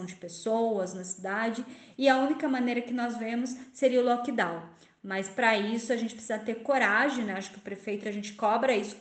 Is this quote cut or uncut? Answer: uncut